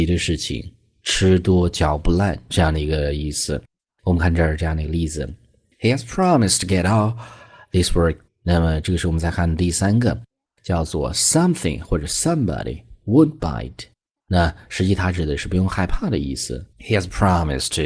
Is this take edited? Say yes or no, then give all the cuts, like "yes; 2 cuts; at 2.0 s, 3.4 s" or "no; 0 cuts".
yes; 3 cuts; at 8.3 s, 14.2 s, 16.7 s